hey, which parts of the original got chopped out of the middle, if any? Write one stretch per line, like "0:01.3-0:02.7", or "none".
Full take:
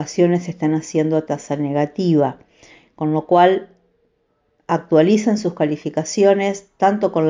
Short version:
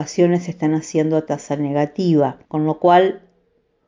0:02.5-0:02.9